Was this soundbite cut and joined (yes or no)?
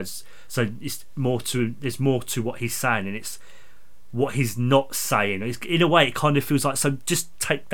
no